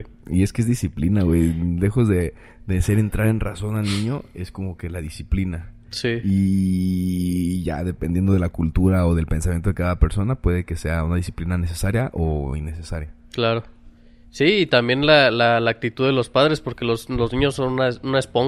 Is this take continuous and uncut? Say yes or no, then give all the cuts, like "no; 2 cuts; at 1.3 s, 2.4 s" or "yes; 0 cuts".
yes; 0 cuts